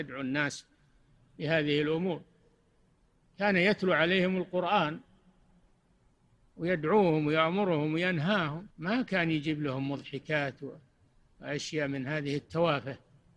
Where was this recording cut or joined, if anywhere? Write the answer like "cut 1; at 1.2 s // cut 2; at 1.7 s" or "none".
cut 1; at 8.7 s